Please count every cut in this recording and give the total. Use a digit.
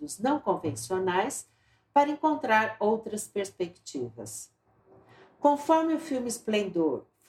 0